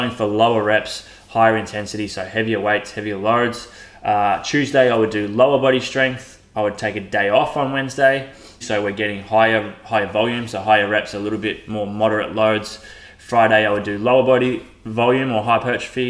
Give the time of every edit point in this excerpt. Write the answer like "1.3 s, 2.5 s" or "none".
8.6 s